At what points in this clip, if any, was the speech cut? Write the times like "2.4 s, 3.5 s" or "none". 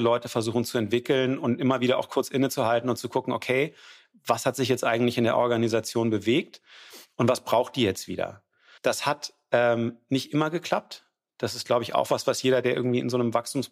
8.8 s